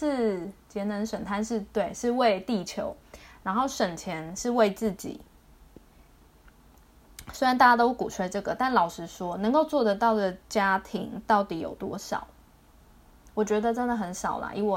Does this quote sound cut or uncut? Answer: uncut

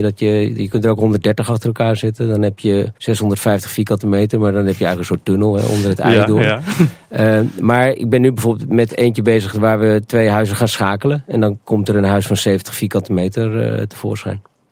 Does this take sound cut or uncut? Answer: cut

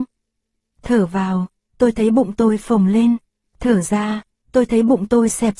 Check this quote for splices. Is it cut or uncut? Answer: uncut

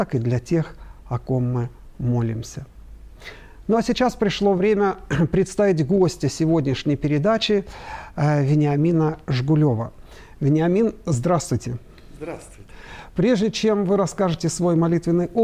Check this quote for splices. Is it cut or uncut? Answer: uncut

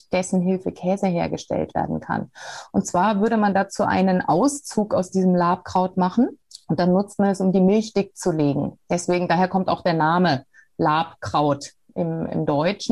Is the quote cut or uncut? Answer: uncut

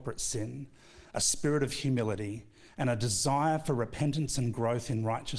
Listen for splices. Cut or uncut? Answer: uncut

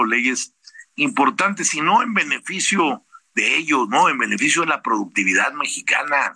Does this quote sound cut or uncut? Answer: uncut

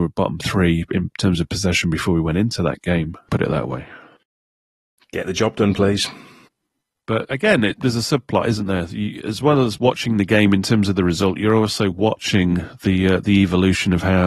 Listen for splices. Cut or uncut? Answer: cut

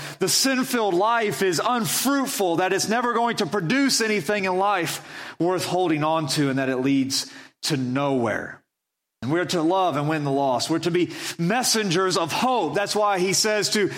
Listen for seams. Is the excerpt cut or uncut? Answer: cut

